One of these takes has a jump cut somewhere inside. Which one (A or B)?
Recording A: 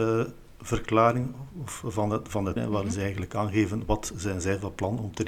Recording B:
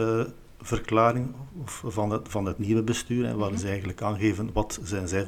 A